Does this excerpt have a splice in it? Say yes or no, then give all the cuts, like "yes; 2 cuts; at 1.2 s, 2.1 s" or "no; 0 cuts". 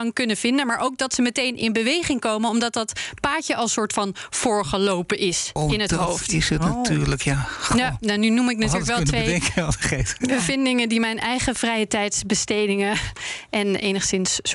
yes; 1 cut; at 5.6 s